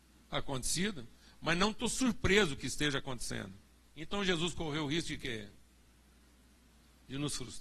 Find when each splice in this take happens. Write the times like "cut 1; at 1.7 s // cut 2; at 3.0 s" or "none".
cut 1; at 3.9 s